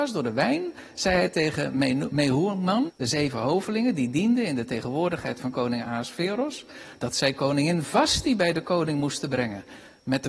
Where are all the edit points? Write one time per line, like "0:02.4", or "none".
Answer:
0:02.9